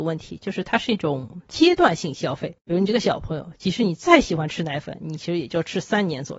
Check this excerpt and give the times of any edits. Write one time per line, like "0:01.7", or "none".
none